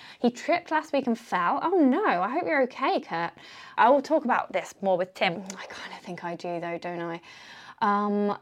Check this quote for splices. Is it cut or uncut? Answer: cut